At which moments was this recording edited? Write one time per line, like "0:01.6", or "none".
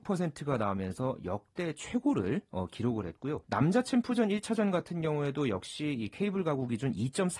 0:03.4